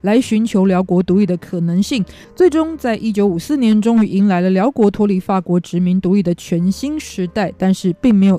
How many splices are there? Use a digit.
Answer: 0